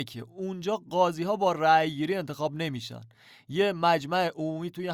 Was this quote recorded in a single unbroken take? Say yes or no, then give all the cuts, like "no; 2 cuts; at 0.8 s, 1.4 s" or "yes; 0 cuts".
yes; 0 cuts